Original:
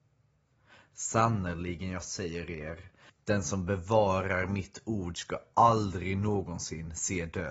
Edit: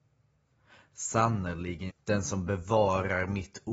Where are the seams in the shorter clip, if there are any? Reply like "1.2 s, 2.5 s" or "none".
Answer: 1.9 s